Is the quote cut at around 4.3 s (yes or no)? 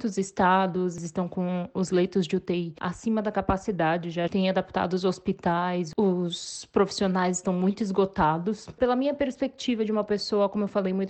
yes